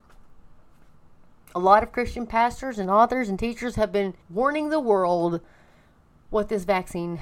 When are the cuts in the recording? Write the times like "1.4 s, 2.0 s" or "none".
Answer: 4.2 s